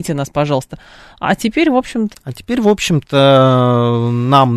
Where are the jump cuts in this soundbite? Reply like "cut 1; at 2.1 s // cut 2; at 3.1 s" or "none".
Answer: cut 1; at 2.1 s